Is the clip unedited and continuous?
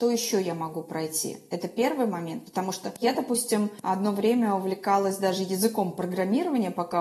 yes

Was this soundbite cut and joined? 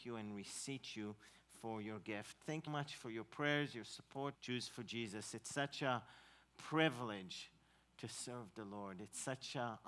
yes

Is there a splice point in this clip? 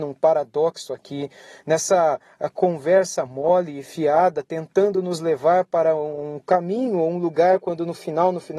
no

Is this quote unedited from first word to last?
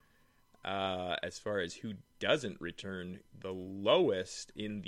no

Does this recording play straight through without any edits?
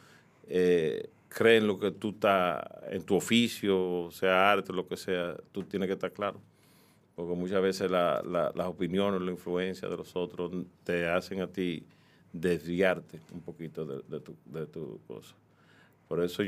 yes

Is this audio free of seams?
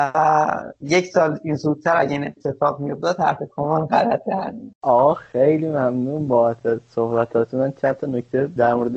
no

